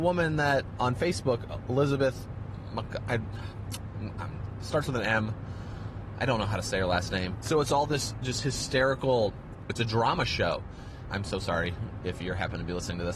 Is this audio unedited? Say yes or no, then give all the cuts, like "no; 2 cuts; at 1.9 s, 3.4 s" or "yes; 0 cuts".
no; 3 cuts; at 7.3 s, 9.7 s, 11.1 s